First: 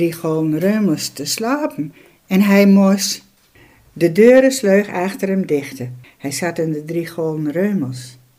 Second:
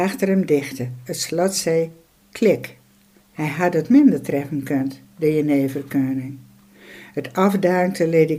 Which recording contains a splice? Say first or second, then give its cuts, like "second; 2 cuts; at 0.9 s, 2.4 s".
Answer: first; 1 cut; at 6.0 s